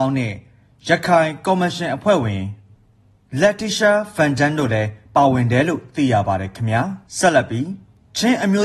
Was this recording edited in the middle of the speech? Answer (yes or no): yes